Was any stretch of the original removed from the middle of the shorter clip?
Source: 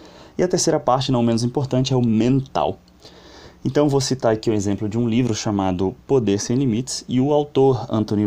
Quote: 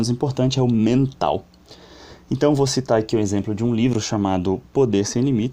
no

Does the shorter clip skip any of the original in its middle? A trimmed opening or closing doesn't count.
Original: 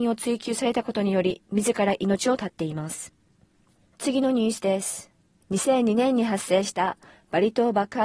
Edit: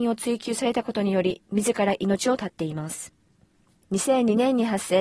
yes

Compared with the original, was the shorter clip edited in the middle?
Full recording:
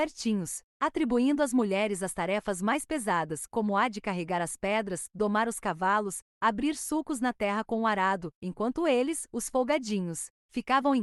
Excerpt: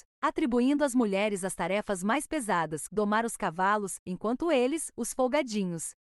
yes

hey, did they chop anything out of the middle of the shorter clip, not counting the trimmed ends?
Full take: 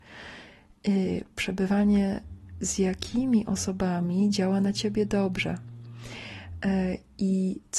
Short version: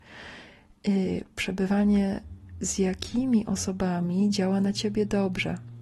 no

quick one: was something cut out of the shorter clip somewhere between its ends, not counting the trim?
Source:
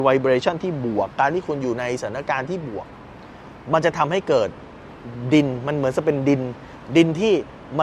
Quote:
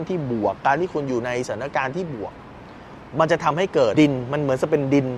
yes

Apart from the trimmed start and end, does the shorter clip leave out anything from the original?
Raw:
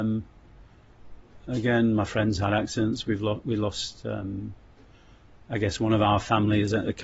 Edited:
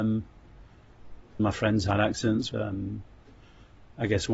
yes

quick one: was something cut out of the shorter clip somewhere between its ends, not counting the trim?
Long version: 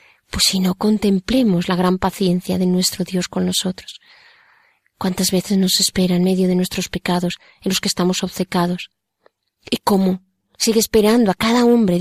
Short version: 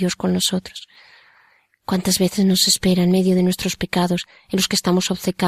no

